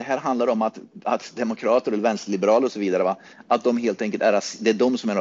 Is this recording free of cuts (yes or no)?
yes